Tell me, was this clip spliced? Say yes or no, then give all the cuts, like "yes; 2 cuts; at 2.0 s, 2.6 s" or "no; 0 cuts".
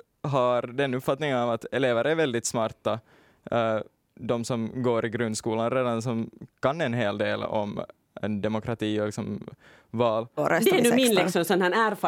yes; 1 cut; at 10.4 s